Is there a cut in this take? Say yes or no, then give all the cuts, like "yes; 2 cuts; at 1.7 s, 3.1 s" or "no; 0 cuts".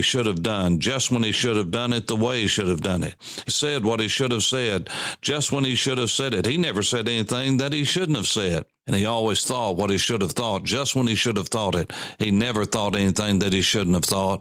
yes; 1 cut; at 3.5 s